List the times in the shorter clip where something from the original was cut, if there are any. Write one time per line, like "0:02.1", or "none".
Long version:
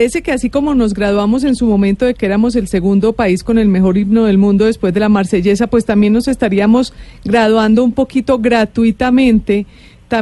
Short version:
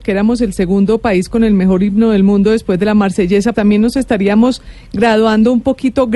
0:03.5